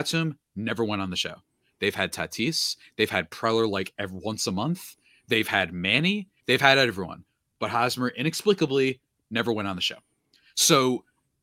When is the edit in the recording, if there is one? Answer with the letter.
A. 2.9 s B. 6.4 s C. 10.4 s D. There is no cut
B